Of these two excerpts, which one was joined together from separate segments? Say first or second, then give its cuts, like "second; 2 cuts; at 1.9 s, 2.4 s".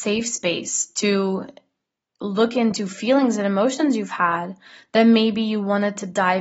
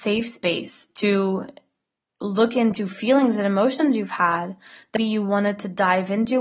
second; 1 cut; at 5.0 s